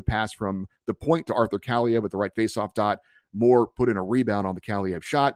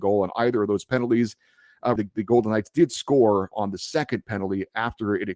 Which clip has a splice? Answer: second; 2 cuts; at 2.0 s, 3.5 s

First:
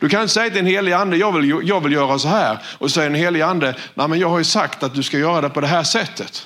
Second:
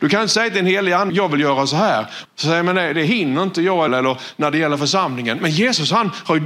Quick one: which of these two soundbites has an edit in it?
second; 3 cuts; at 1.1 s, 2.3 s, 3.9 s

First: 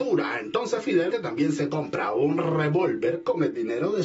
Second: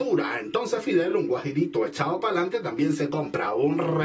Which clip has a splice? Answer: first; 1 cut; at 1.1 s

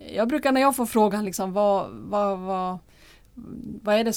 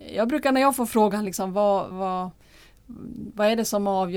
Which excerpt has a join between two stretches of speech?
second; 1 cut; at 1.9 s

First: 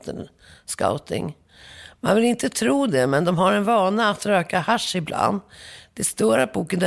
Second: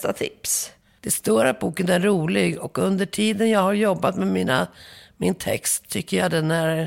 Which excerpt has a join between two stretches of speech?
second; 1 cut; at 1.0 s

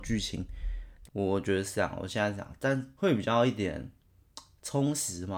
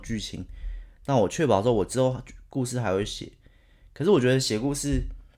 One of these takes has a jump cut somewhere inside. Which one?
first; 2 cuts; at 1.0 s, 2.9 s

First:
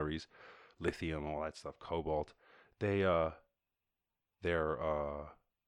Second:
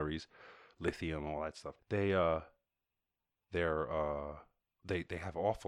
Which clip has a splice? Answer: second; 1 cut; at 1.8 s

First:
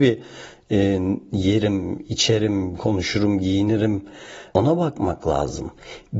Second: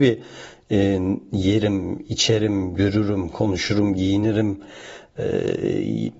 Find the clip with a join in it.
first; 2 cuts; at 2.7 s, 4.5 s

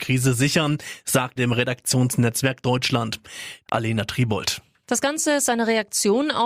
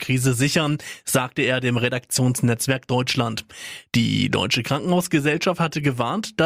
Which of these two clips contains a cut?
first; 2 cuts; at 1.4 s, 3.7 s

